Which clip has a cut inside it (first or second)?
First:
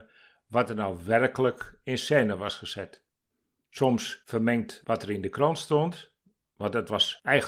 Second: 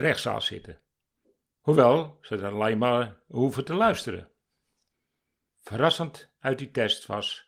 second